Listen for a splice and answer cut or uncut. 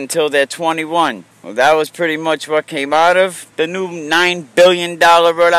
cut